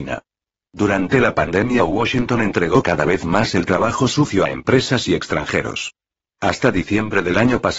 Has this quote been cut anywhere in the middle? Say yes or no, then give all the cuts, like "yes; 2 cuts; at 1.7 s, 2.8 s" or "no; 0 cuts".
yes; 1 cut; at 6.2 s